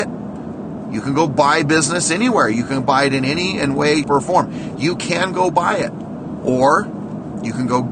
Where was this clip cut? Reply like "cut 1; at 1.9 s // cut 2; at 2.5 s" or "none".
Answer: cut 1; at 4.0 s